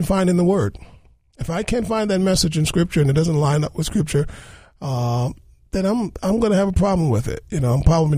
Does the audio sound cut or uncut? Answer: uncut